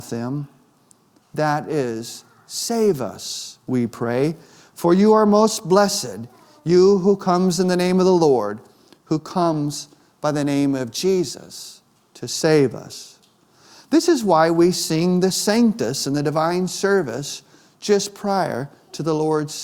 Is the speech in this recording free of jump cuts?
yes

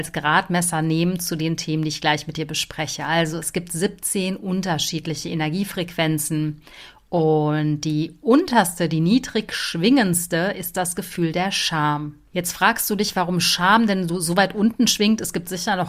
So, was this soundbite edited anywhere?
no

